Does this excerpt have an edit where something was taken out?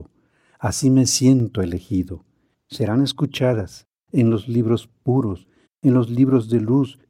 yes; 3 cuts; at 2.5 s, 4.1 s, 5.7 s

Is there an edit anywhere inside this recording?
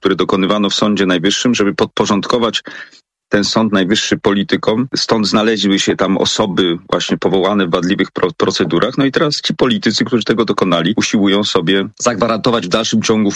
no; 0 cuts

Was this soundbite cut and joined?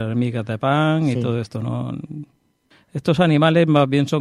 yes; 1 cut; at 2.7 s

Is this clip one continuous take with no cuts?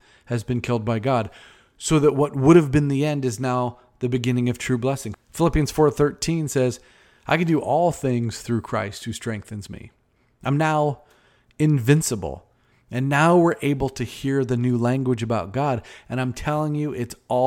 no; 2 cuts; at 5.1 s, 12.7 s

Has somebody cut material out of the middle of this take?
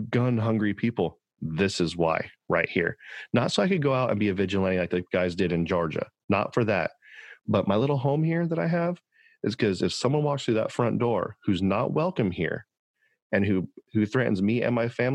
no; 0 cuts

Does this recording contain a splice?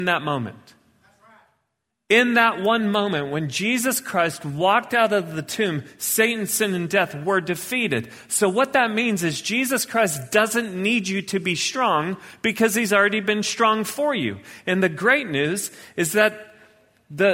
no; 0 cuts

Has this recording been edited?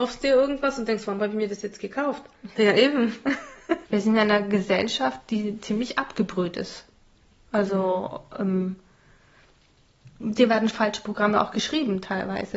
yes; 3 cuts; at 2.5 s, 3.8 s, 10.2 s

